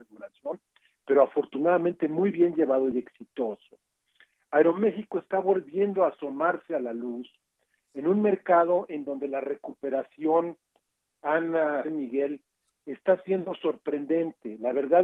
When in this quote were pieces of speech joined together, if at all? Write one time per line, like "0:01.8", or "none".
0:02.9
0:11.8